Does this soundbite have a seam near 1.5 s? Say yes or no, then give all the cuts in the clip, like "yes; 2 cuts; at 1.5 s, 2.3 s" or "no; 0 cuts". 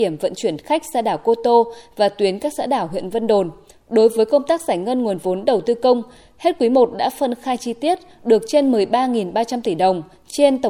no; 1 cut; at 3.7 s